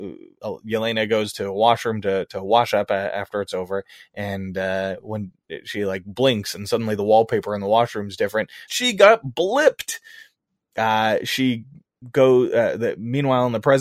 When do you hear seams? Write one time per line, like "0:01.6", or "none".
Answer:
0:08.7